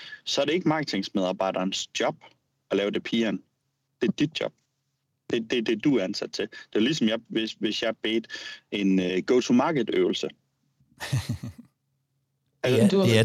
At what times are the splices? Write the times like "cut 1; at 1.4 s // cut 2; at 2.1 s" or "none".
cut 1; at 7.3 s // cut 2; at 9.1 s